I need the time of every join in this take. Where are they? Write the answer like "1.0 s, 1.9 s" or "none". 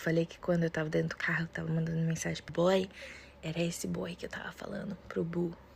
2.5 s

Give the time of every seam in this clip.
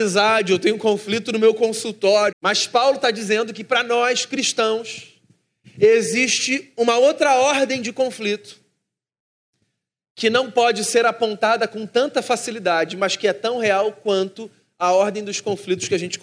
2.3 s

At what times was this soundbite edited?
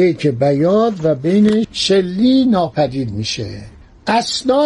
1.6 s

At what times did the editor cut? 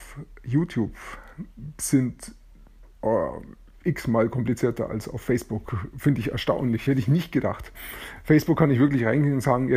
none

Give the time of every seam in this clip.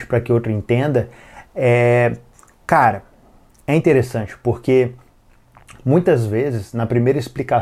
none

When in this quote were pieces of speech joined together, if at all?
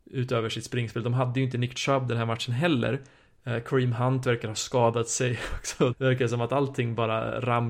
5.9 s

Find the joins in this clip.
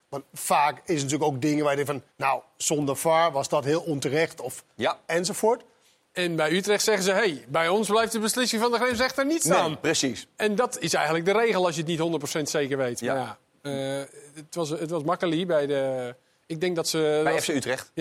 2.1 s, 6.0 s

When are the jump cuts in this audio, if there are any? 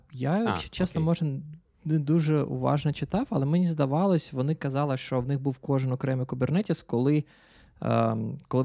none

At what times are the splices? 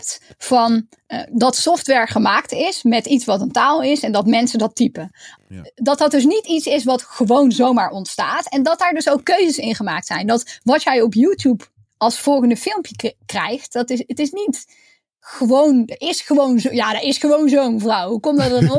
5.4 s

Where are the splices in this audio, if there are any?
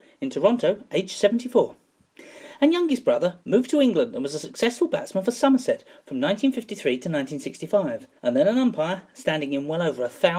3.4 s, 8.2 s

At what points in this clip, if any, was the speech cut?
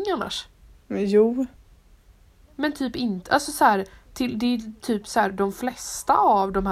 none

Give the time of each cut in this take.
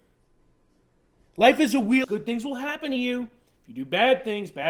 2.0 s

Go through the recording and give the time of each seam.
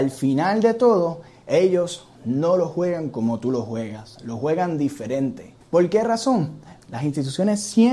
5.6 s, 6.8 s

